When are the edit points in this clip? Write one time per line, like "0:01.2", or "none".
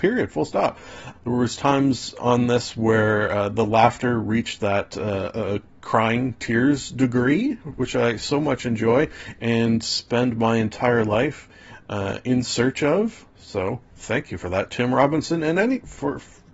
0:01.1